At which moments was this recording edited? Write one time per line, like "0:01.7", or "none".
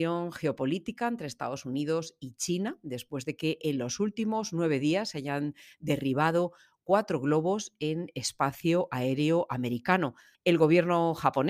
0:10.3